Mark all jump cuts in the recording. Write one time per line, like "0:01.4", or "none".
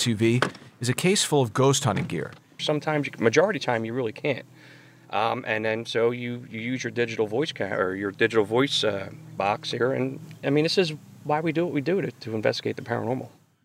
0:02.6